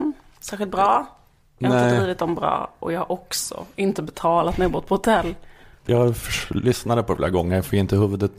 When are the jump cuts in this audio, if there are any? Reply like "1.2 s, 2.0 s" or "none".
none